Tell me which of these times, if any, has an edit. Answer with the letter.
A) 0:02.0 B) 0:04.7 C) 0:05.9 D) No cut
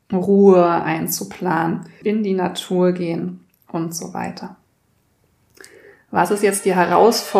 A